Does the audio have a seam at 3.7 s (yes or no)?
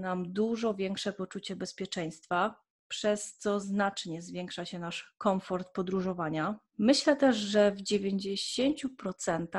no